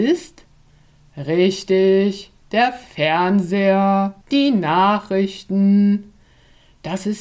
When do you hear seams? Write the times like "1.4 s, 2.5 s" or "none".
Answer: 4.2 s